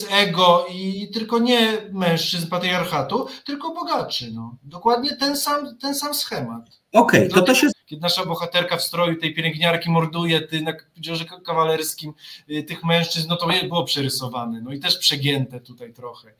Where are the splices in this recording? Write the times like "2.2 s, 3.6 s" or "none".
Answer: 7.7 s